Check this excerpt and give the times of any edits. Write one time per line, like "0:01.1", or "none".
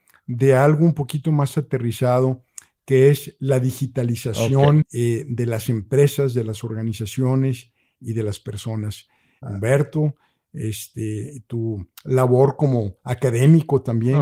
0:04.8
0:09.4